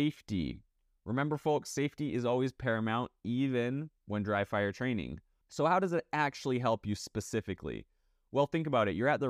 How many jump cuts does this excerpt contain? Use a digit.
1